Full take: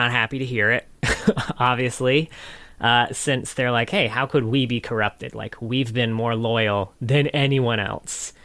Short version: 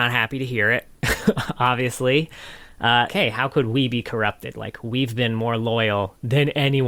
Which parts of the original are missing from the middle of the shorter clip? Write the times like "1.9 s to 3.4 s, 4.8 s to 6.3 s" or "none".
3.1 s to 3.9 s